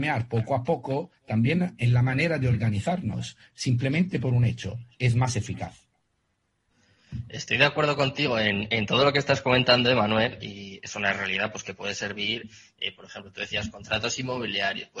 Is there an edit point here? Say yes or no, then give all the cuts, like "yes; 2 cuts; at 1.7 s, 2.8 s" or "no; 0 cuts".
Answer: no; 0 cuts